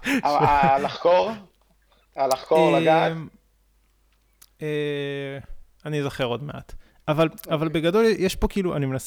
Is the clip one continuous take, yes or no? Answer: yes